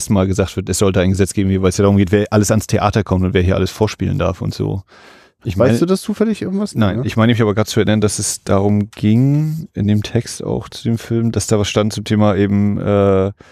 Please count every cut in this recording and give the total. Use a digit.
1